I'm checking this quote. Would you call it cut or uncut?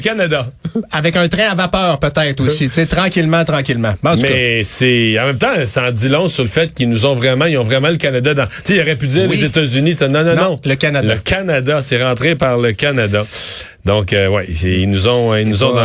uncut